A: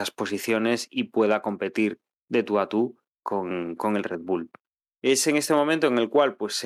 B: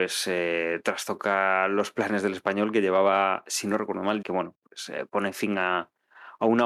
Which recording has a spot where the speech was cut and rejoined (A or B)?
B